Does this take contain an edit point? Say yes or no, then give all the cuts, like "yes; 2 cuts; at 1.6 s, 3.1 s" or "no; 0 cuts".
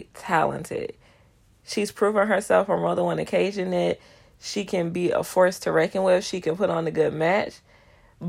no; 0 cuts